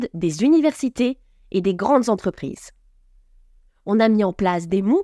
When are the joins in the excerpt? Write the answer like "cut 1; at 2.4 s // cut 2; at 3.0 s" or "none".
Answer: cut 1; at 3.7 s